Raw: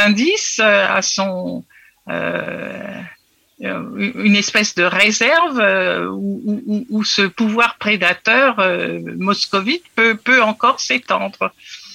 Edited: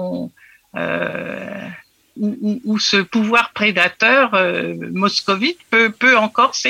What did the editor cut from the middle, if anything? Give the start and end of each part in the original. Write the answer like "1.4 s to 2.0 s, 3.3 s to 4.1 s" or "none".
3.5 s to 6.4 s